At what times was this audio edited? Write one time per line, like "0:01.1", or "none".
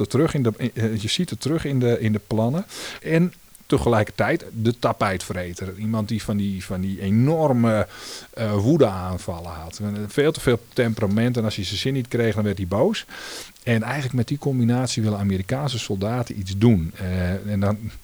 0:03.0

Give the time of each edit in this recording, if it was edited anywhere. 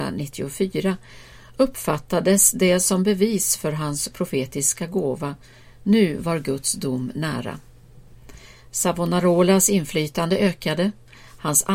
none

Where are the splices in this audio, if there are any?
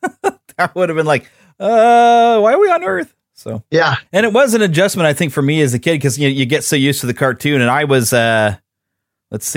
0:04.1

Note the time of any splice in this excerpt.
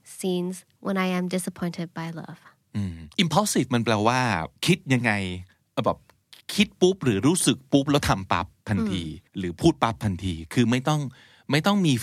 0:03.1
0:04.6
0:09.3

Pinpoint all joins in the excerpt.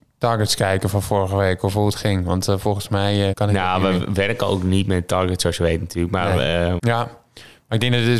0:03.3
0:06.8

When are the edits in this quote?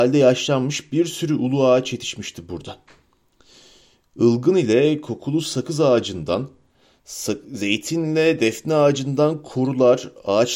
none

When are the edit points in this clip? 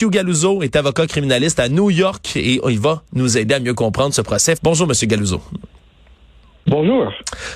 0:04.6

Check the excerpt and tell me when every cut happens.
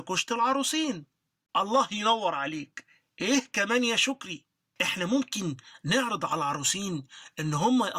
none

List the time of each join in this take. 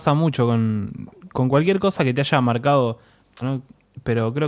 0:01.3
0:03.4

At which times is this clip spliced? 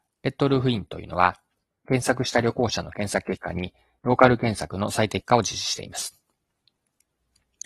0:04.0

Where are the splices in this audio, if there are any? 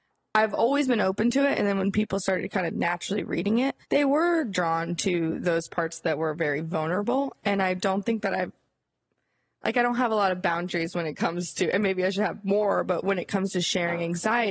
0:03.8

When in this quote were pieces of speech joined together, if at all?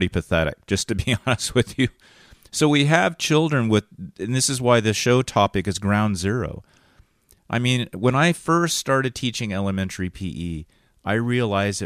none

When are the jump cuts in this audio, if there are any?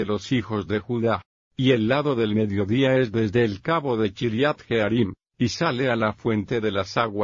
0:01.4
0:05.3

